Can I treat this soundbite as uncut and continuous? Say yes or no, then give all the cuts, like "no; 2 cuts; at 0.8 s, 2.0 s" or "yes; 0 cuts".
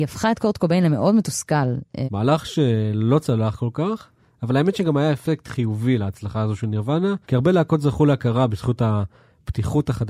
no; 2 cuts; at 2.0 s, 7.2 s